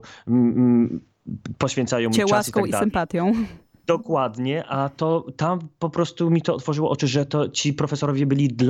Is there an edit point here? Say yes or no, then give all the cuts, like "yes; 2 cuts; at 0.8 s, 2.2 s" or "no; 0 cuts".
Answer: no; 0 cuts